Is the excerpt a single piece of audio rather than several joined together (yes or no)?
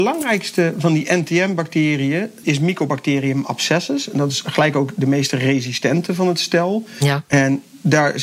no